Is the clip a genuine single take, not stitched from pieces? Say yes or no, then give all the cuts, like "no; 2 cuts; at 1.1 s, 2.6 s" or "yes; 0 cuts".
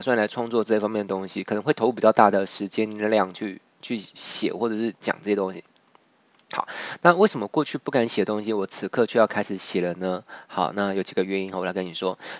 yes; 0 cuts